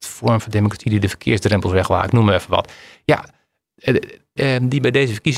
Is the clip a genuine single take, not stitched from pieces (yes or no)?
no